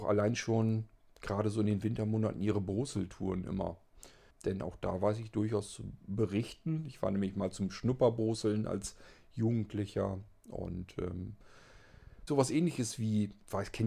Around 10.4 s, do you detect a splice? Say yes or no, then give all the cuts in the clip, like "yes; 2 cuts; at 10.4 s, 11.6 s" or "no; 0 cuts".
no; 2 cuts; at 4.3 s, 12.3 s